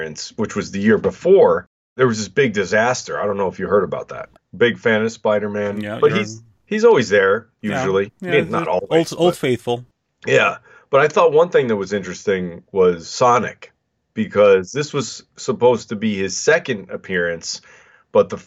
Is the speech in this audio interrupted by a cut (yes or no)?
yes